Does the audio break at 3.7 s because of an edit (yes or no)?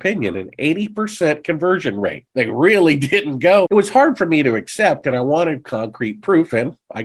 yes